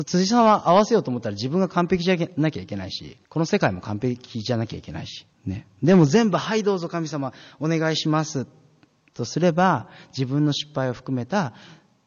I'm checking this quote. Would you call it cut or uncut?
cut